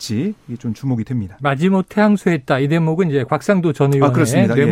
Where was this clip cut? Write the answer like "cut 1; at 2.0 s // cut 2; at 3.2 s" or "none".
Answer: cut 1; at 1.4 s